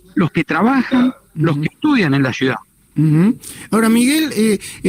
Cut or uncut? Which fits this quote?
uncut